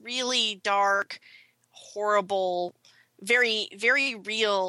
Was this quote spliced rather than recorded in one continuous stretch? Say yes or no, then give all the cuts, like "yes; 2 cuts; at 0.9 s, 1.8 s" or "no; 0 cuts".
no; 0 cuts